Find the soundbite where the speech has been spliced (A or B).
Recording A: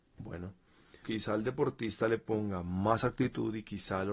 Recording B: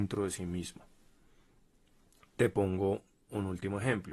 A